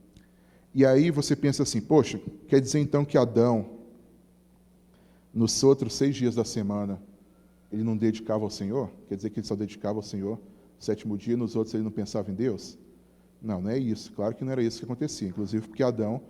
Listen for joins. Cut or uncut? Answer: uncut